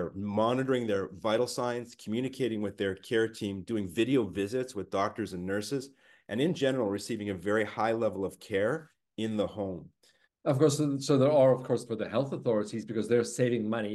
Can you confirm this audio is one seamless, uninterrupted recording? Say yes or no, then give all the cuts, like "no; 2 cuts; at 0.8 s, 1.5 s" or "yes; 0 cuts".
no; 2 cuts; at 10.2 s, 11.8 s